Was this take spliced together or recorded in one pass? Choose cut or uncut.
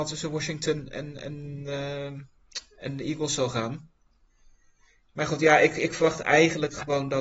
uncut